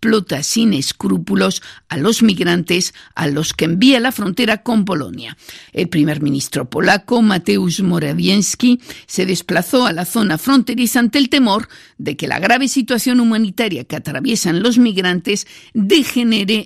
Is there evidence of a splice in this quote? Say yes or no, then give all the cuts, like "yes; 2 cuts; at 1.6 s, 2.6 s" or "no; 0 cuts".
yes; 1 cut; at 5.7 s